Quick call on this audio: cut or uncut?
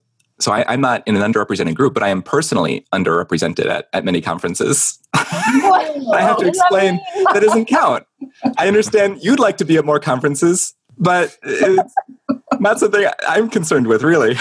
uncut